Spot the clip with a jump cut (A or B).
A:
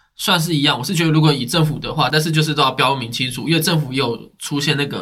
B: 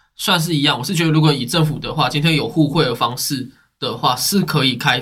A